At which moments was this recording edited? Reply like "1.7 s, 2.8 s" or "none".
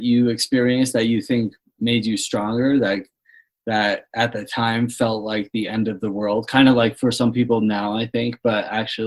none